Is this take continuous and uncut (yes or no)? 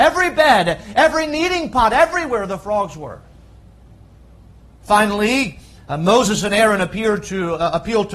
yes